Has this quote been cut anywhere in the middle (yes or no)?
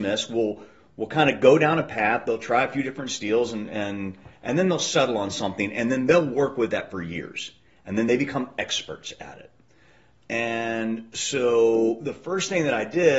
no